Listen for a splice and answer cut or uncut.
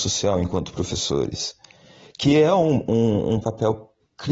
uncut